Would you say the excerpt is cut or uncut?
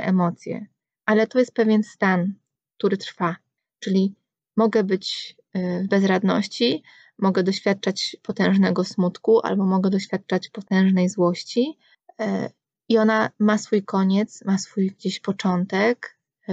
uncut